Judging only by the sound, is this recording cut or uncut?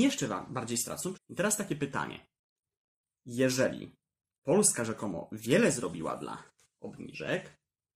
cut